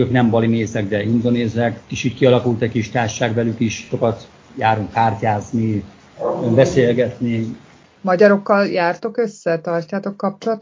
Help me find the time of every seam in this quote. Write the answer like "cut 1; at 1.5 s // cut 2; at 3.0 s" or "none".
none